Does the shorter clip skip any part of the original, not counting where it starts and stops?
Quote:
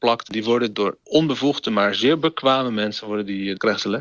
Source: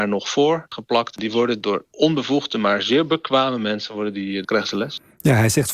no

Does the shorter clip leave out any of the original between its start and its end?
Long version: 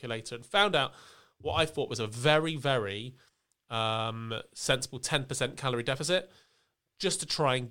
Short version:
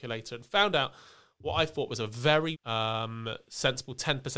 yes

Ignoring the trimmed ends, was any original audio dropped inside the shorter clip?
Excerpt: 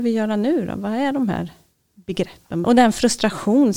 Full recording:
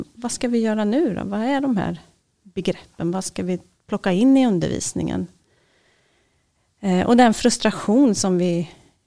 yes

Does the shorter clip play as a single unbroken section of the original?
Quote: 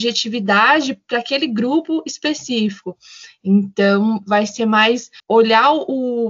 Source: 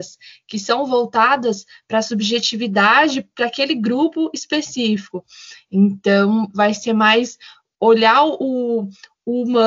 no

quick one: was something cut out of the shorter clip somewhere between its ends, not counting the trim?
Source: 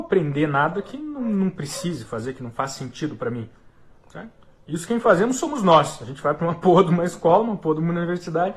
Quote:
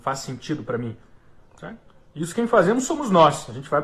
no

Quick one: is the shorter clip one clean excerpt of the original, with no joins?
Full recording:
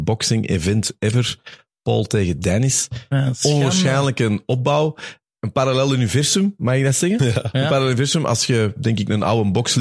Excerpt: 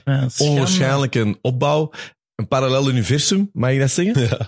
yes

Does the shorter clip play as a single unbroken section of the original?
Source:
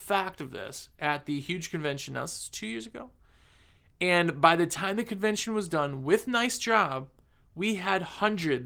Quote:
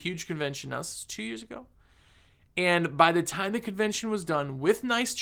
yes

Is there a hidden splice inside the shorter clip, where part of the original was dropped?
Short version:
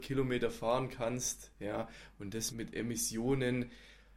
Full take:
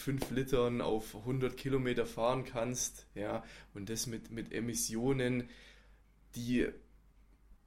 yes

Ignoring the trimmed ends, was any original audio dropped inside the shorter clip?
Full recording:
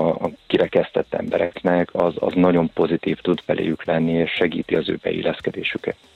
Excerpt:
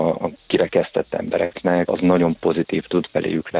yes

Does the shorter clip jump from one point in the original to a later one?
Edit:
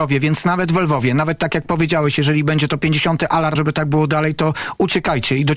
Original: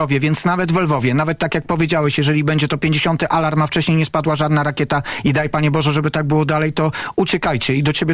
yes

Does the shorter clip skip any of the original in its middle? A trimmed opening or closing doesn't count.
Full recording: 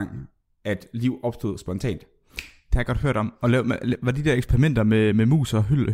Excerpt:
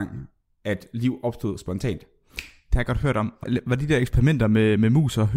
yes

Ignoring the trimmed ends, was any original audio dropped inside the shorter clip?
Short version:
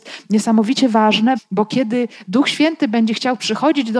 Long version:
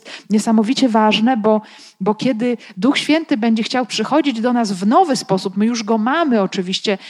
yes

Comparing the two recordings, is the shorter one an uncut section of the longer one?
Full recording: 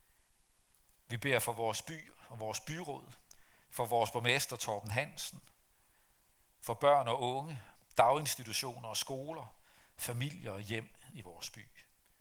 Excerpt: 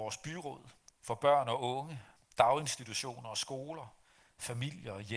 no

